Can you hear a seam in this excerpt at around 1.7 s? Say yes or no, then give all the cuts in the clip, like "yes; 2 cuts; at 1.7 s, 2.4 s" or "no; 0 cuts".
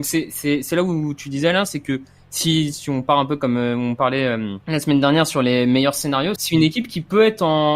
no; 2 cuts; at 4.6 s, 6.4 s